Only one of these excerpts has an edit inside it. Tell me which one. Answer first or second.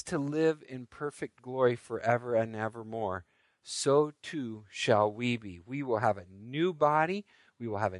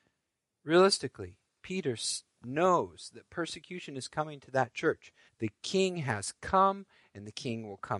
second